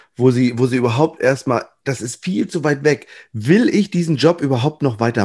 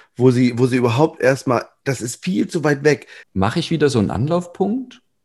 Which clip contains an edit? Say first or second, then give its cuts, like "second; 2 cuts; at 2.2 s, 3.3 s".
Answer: second; 1 cut; at 3.2 s